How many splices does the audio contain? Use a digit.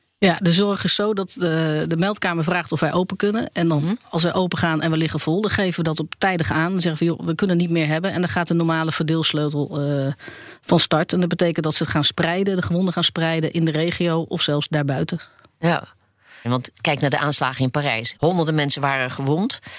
2